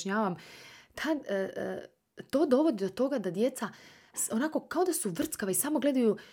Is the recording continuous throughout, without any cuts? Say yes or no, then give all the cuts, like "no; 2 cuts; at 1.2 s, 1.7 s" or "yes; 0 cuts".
yes; 0 cuts